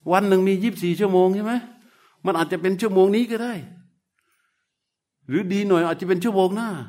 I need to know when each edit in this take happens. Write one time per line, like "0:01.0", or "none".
none

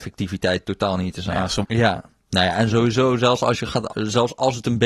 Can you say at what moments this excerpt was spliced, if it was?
0:01.6
0:03.9

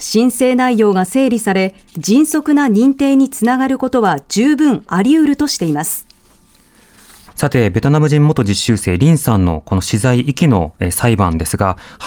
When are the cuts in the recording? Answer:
0:07.3

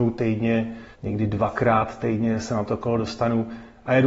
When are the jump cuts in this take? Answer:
0:00.9
0:02.4

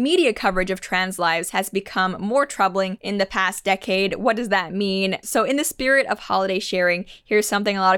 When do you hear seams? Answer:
0:05.2

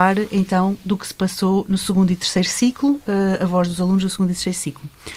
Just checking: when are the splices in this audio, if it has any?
none

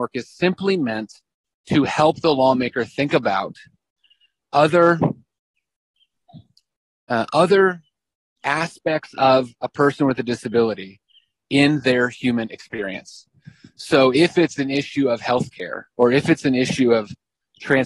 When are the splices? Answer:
none

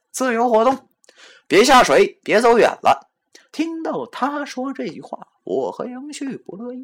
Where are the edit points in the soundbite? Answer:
0:03.5

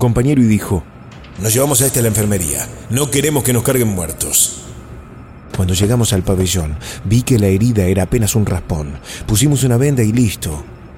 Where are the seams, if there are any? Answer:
0:05.5

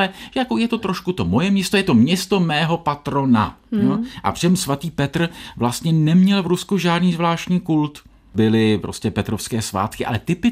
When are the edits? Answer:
0:03.7

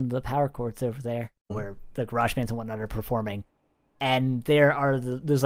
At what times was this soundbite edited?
0:01.5

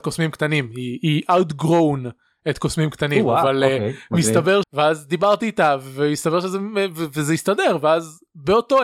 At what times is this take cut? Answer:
0:04.6

